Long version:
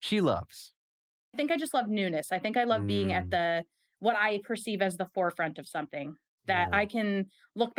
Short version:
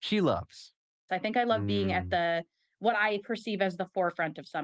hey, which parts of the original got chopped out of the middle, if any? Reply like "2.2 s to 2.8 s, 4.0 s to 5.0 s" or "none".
1.1 s to 2.3 s